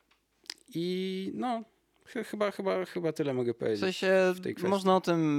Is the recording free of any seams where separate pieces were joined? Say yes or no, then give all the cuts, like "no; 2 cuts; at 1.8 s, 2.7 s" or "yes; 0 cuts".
no; 1 cut; at 2.9 s